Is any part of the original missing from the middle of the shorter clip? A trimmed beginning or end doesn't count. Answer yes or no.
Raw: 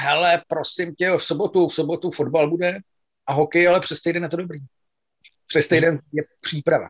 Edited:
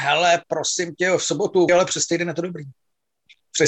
yes